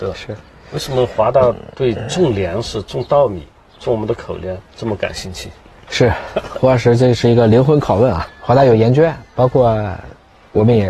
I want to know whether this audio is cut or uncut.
cut